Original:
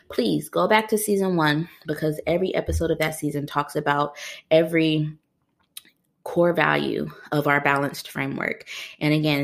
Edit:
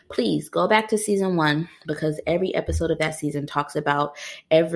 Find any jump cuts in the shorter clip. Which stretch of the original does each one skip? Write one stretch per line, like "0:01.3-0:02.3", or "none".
none